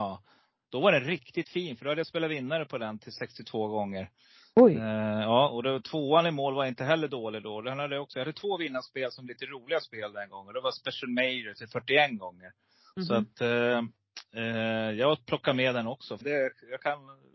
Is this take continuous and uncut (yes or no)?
no